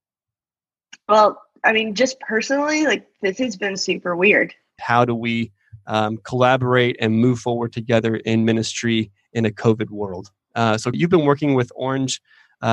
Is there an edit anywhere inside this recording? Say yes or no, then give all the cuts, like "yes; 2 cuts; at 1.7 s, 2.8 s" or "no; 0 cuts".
yes; 2 cuts; at 4.8 s, 10.9 s